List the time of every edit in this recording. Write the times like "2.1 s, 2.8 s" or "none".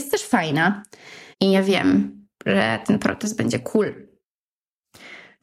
1.3 s

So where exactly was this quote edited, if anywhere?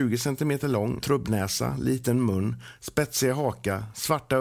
1.0 s

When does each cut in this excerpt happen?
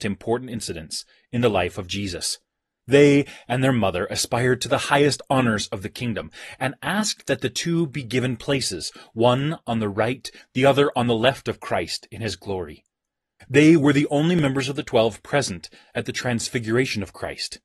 2.8 s, 13.4 s

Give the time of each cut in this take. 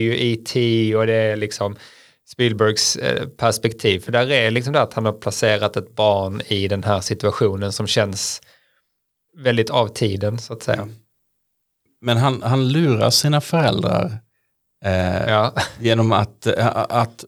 none

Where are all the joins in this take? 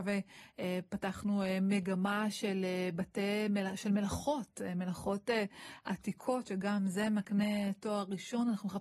none

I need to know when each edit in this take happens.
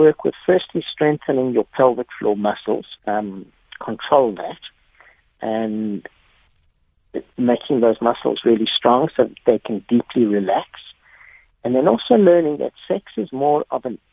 3.0 s

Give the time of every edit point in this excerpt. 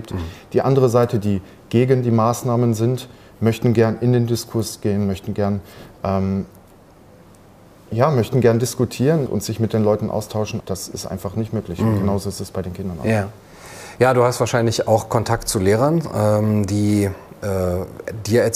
9.3 s, 10.6 s

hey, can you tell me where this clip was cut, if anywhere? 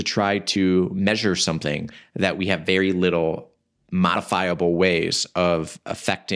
none

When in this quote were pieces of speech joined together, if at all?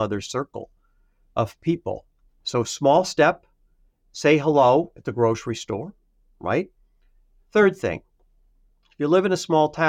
none

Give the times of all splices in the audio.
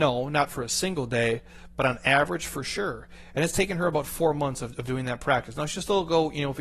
none

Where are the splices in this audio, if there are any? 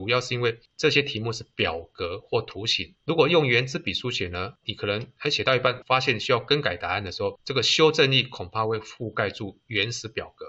none

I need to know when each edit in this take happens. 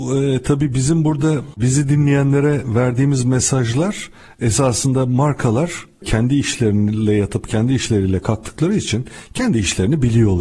none

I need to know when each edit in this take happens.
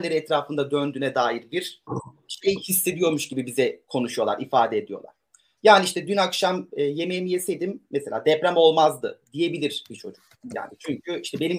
none

